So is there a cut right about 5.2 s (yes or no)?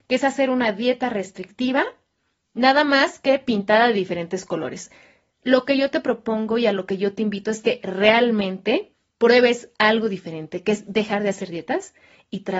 no